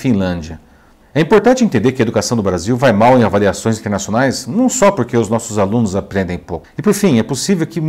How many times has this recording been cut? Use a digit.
2